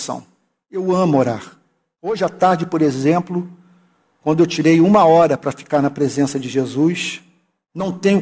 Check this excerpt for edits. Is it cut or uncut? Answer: uncut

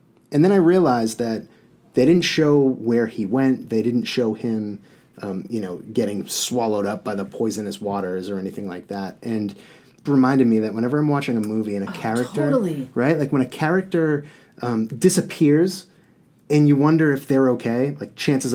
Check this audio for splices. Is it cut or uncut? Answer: cut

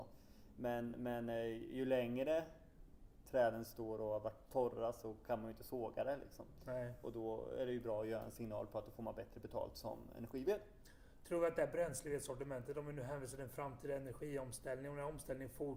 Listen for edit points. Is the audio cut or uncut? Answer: uncut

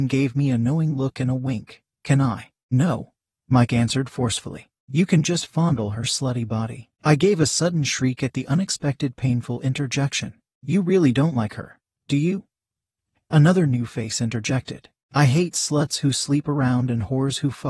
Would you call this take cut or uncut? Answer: cut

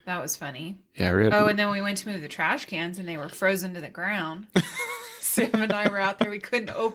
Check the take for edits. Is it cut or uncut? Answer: uncut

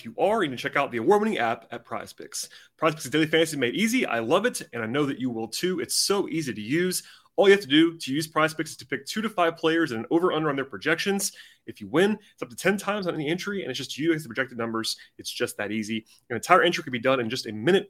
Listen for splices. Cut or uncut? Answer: uncut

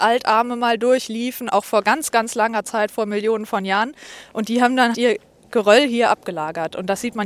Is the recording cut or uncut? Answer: cut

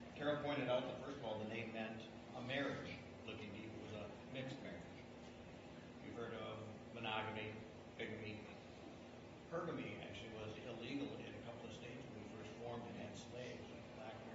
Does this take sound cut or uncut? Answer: cut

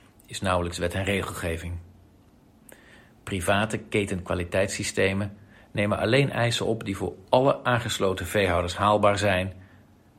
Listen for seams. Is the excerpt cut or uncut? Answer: uncut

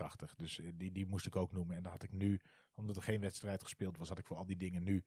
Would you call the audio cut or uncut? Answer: uncut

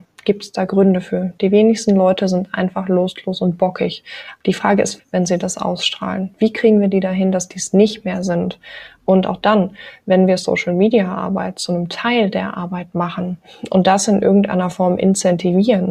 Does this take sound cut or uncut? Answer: cut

